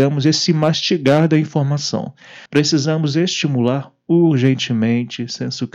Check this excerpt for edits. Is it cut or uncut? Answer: cut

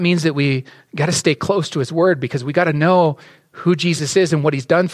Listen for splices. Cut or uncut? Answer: uncut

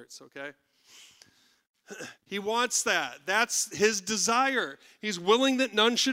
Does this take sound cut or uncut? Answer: cut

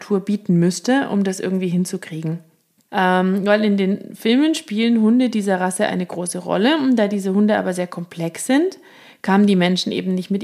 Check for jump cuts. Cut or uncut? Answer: cut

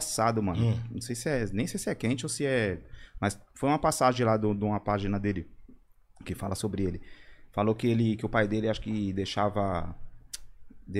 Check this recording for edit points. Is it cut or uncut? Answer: uncut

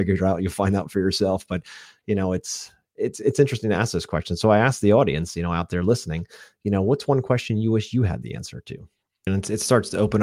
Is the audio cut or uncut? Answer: cut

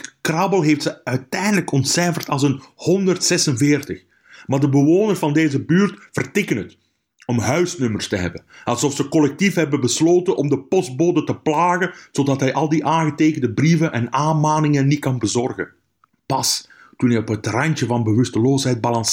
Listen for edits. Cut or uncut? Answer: cut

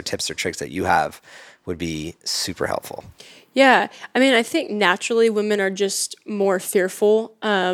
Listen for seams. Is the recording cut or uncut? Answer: uncut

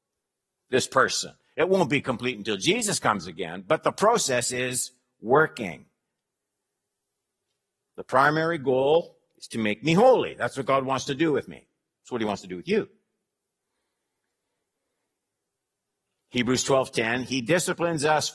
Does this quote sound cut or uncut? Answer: uncut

